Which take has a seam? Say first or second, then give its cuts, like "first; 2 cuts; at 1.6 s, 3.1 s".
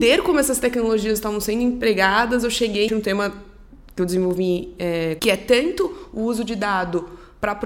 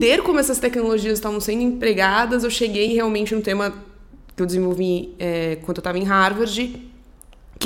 first; 2 cuts; at 2.9 s, 5.2 s